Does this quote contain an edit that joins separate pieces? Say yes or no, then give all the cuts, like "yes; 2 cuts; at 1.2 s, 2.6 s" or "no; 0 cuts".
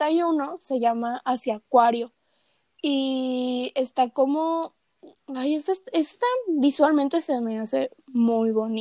no; 0 cuts